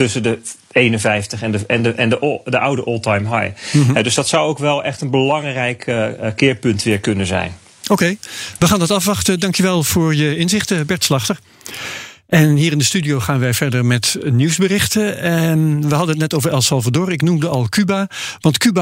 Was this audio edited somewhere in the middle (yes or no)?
no